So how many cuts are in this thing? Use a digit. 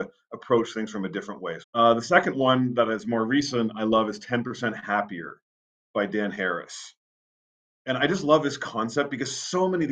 1